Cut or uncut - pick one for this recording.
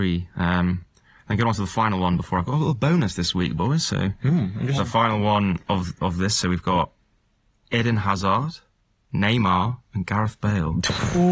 cut